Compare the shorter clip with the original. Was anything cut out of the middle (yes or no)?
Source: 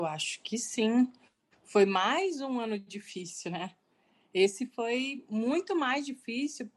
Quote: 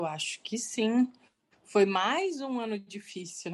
no